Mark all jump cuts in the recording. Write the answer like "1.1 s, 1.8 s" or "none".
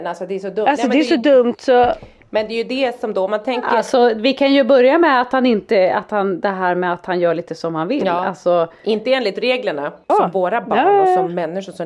10.1 s